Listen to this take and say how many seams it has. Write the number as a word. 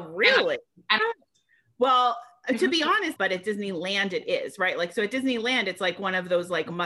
two